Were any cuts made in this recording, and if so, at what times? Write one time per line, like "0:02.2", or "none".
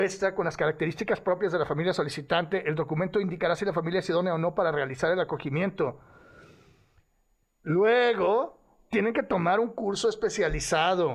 none